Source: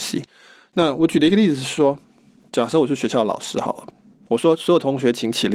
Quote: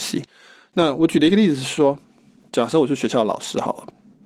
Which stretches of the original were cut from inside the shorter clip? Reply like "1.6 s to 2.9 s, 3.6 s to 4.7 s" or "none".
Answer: none